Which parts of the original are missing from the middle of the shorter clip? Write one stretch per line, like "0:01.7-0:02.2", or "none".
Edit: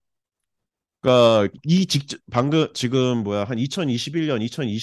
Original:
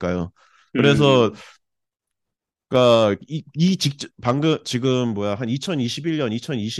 0:03.2-0:03.5